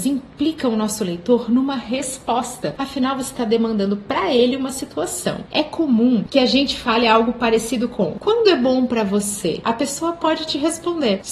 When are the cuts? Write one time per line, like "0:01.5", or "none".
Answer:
0:09.6